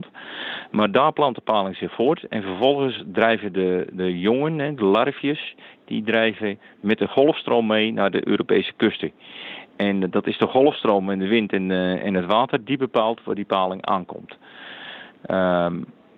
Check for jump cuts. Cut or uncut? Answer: uncut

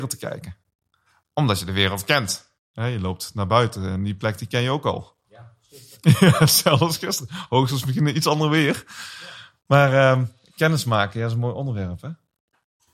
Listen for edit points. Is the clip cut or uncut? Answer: uncut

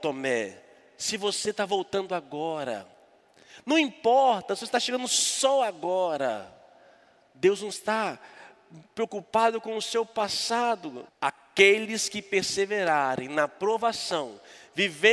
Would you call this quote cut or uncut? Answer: cut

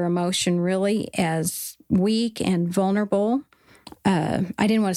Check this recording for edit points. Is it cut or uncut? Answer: cut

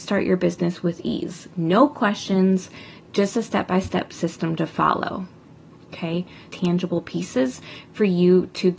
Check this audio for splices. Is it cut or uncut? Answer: cut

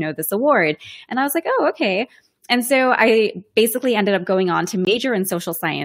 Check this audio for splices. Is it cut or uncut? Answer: uncut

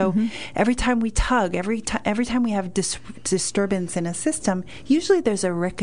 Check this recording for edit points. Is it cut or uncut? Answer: uncut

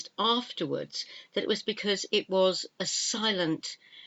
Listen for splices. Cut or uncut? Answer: uncut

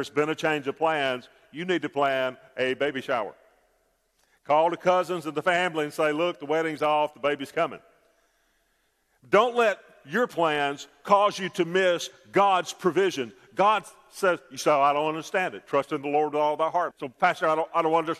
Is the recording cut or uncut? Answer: cut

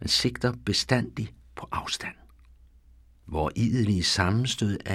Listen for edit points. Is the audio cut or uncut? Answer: uncut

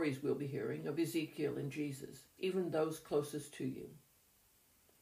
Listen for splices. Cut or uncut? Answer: cut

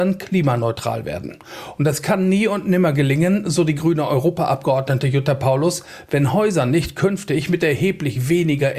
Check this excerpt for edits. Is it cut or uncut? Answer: uncut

